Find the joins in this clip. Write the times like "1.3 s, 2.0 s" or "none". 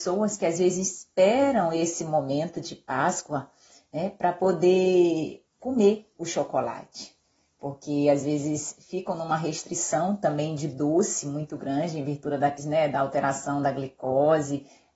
5.5 s, 12.6 s